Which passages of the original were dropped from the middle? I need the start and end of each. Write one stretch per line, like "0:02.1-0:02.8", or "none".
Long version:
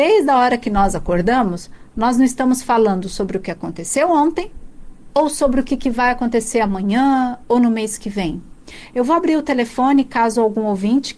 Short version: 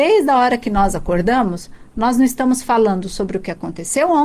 none